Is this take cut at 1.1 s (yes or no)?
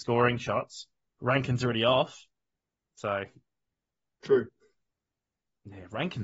yes